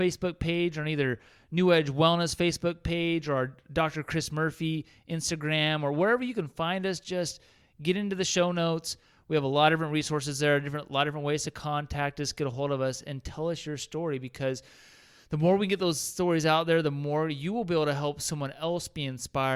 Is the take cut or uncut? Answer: uncut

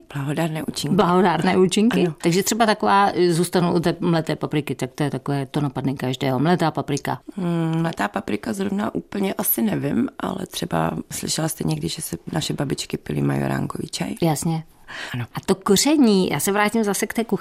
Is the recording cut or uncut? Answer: cut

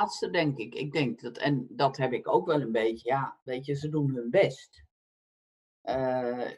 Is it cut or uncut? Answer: cut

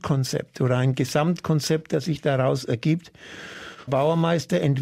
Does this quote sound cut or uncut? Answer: cut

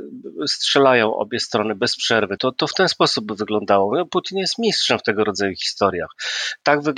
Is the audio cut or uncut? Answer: cut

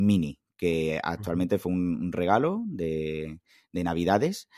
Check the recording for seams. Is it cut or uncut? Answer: uncut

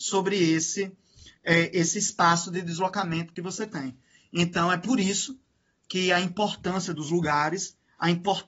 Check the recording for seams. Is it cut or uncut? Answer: uncut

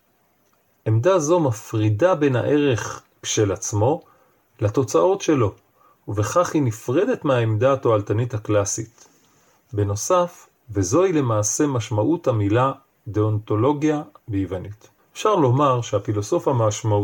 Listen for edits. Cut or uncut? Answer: cut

